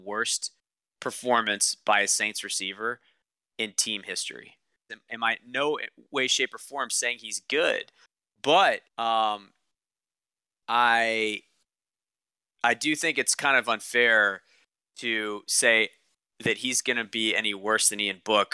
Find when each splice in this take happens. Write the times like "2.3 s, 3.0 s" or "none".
4.9 s, 8.9 s